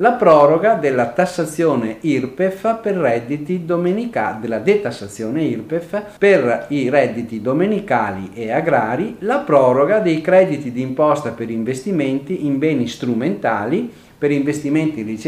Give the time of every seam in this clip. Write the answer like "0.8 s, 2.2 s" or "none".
6.2 s

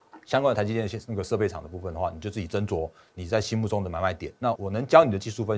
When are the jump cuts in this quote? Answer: 4.6 s

